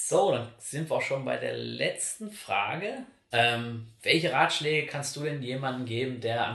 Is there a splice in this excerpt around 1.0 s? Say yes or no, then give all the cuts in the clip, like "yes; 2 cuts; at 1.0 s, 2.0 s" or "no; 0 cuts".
no; 1 cut; at 3.3 s